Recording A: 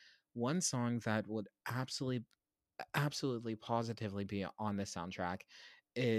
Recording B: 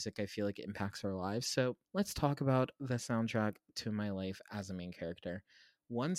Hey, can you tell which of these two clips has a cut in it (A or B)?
B